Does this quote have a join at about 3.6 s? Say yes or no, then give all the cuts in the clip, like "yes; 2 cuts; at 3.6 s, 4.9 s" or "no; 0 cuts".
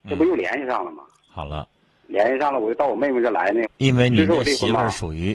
yes; 1 cut; at 3.6 s